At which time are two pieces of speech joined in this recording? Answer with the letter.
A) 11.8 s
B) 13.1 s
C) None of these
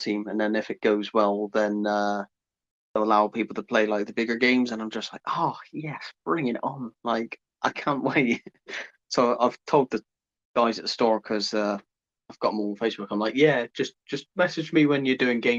C